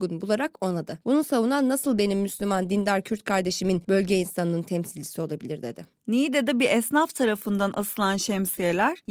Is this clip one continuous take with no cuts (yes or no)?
no